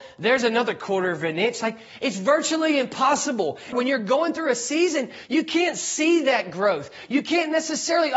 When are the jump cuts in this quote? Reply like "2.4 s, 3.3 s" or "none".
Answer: 3.7 s